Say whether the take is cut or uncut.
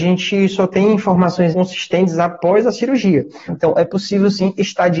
cut